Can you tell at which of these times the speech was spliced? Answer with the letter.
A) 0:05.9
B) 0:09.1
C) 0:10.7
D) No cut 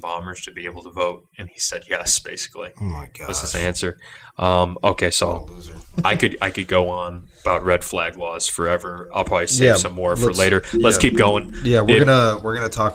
A